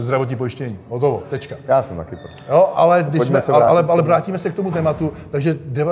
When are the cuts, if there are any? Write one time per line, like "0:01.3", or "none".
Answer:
none